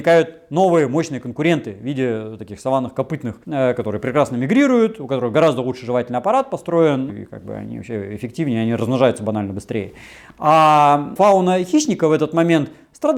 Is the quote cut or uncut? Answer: cut